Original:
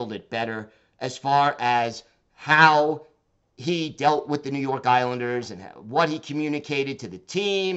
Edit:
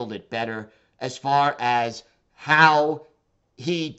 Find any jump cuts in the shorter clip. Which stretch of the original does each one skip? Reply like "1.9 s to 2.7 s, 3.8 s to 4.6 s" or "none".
none